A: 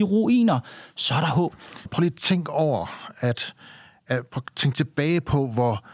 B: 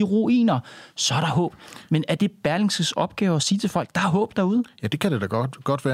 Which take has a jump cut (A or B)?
A